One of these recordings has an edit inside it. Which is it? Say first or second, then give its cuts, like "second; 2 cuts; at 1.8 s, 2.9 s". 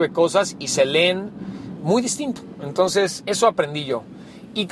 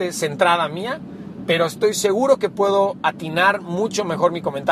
first; 1 cut; at 1.8 s